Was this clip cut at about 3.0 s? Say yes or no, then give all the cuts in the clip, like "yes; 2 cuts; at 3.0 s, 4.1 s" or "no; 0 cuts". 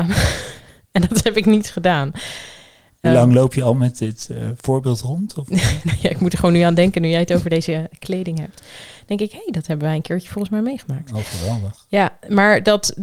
yes; 1 cut; at 3.0 s